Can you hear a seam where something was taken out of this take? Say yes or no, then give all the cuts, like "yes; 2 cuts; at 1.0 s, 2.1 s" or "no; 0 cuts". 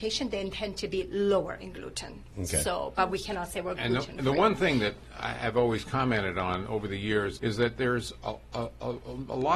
yes; 1 cut; at 7.4 s